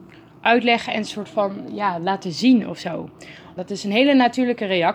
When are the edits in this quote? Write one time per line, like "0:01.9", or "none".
0:03.6